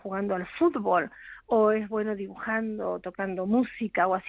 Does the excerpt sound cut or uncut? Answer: uncut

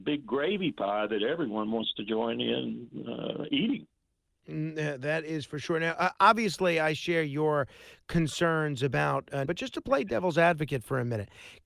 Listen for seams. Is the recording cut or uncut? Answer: cut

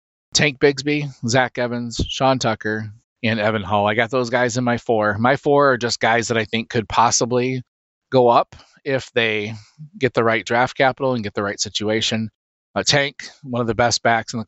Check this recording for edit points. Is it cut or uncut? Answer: cut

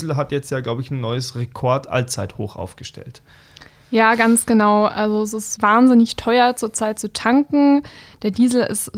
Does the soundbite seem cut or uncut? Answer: cut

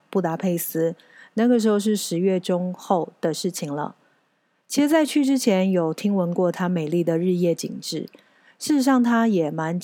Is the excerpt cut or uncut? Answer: uncut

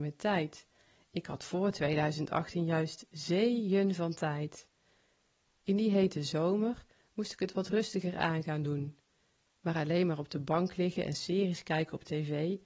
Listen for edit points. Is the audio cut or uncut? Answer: uncut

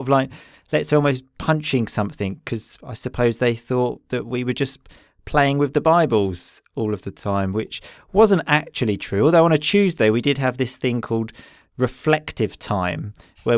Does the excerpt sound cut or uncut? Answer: uncut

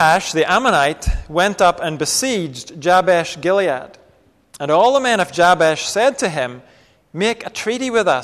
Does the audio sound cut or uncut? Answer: uncut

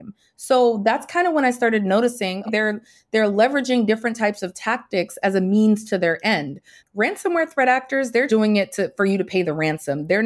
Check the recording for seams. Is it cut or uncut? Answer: cut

